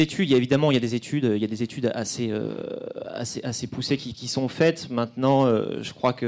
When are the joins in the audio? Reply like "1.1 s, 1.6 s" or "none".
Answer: 4.1 s